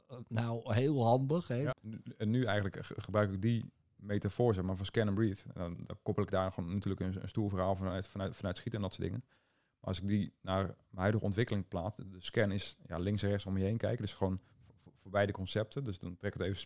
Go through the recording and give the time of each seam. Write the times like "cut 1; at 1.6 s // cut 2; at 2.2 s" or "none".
cut 1; at 1.7 s

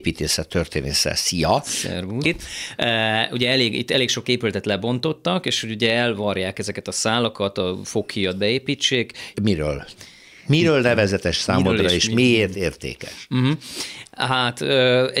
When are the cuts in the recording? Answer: cut 1; at 2.2 s // cut 2; at 9.3 s

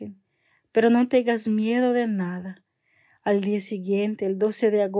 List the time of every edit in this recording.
none

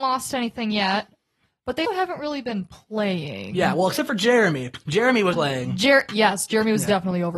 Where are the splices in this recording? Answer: cut 1; at 1.9 s // cut 2; at 5.3 s

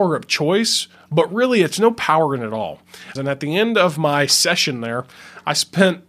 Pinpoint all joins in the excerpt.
cut 1; at 3.2 s

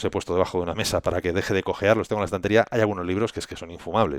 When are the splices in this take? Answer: cut 1; at 1.0 s

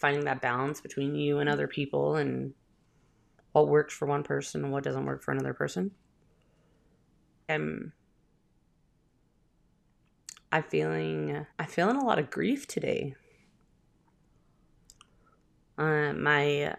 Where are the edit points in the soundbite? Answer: cut 1; at 7.5 s // cut 2; at 11.5 s

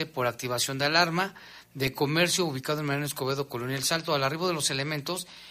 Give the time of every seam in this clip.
none

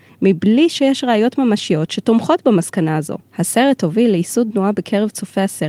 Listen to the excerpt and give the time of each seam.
cut 1; at 3.3 s

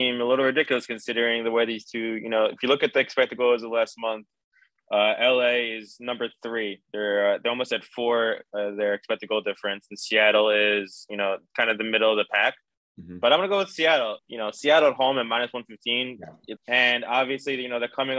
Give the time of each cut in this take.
cut 1; at 14.2 s // cut 2; at 16.6 s

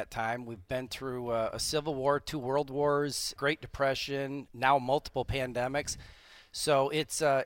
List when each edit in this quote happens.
cut 1; at 3.4 s // cut 2; at 4.5 s

